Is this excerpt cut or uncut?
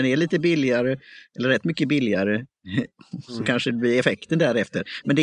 uncut